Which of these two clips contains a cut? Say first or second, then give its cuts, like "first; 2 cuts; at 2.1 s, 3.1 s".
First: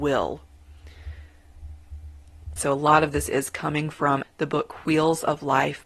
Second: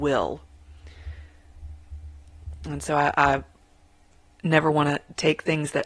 first; 2 cuts; at 2.6 s, 4.2 s